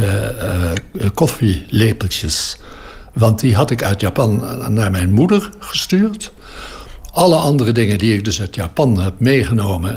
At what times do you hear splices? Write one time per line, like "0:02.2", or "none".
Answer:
none